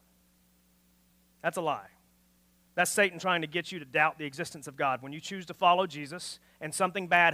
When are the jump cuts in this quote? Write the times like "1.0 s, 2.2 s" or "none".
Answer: none